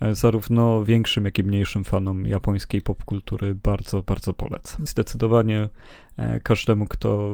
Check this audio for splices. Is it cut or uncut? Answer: cut